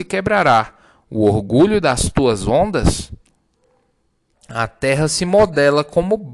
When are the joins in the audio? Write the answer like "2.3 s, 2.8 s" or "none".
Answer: 4.3 s